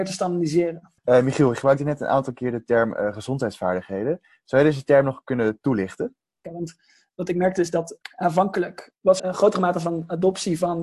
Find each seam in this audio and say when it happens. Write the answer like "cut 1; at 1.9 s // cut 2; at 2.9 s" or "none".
cut 1; at 6.4 s // cut 2; at 9.2 s